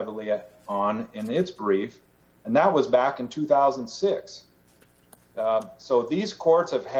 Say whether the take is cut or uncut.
uncut